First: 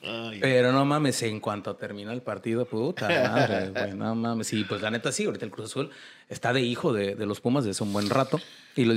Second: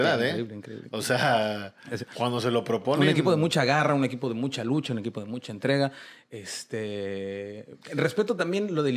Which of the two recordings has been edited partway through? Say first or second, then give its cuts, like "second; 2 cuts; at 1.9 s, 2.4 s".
second; 1 cut; at 7.8 s